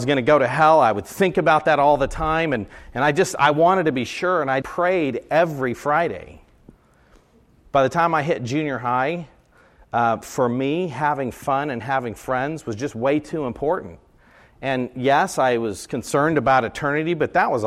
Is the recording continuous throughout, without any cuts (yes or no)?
no